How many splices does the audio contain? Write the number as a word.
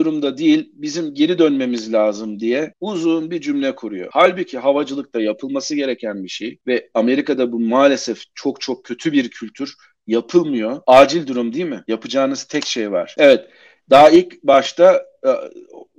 one